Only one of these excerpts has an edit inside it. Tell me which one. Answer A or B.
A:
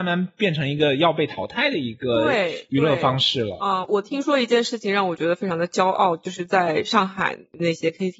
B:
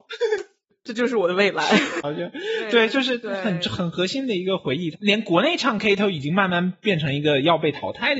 B